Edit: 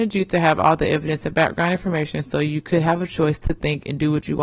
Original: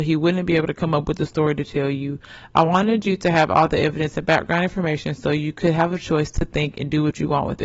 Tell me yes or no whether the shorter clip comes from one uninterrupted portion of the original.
yes